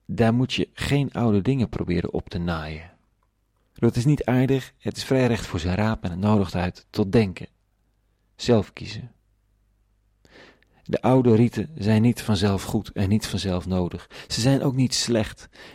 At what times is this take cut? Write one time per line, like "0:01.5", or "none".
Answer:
0:03.7

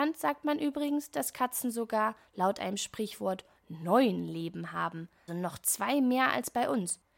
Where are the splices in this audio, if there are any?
0:05.3

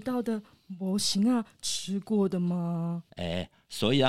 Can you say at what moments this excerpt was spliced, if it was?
0:03.1

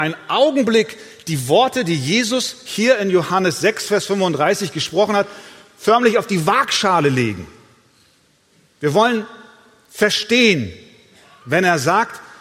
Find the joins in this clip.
0:11.4

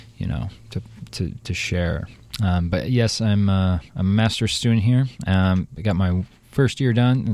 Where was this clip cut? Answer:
none

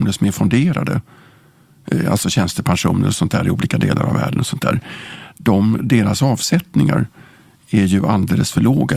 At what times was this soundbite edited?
none

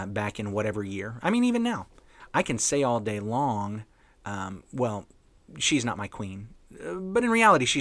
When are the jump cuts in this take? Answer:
none

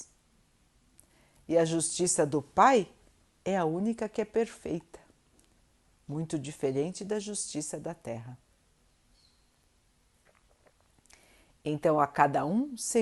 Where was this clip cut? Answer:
none

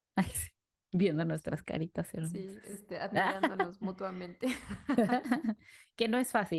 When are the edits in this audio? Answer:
none

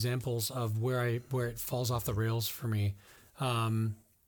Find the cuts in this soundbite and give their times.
none

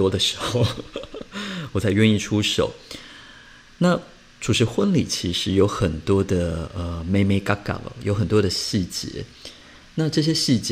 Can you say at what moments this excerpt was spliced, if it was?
none

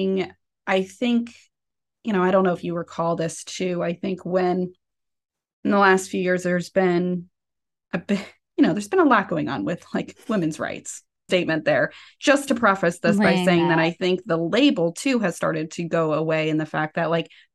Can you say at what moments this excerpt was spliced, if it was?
0:11.3

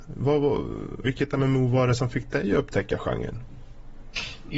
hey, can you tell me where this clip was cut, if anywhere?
0:01.0

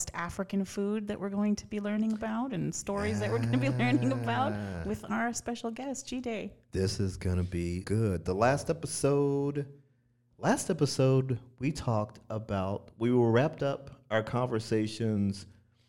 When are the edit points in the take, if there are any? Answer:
0:07.8

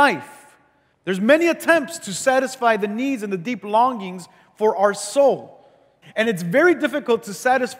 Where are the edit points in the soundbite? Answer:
0:00.9
0:06.0

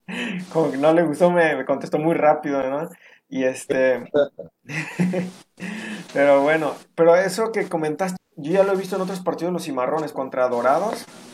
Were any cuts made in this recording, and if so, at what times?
0:08.2
0:10.1

